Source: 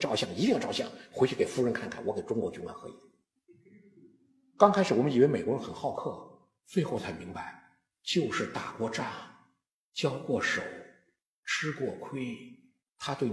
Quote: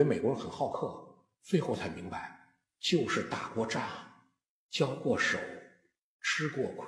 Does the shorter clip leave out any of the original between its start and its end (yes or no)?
no